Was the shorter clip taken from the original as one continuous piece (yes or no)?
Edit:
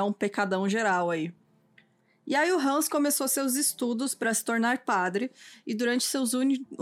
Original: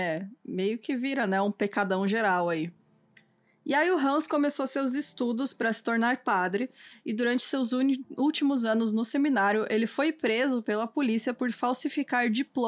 yes